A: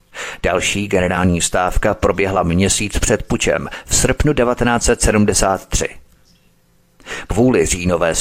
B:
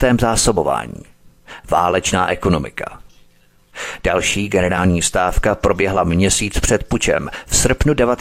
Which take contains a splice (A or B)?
A